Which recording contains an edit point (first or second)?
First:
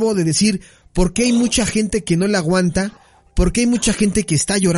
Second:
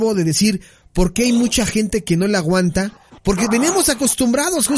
second